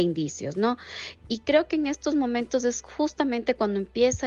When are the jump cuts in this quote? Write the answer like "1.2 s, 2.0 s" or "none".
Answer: none